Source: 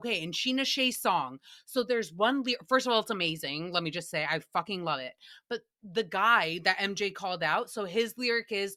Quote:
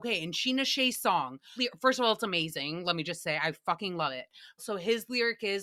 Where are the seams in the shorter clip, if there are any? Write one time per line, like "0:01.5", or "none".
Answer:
0:01.6
0:04.6